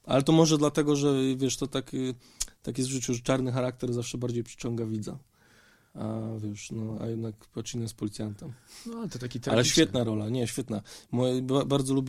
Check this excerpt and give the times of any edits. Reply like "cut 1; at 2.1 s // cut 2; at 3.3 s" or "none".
none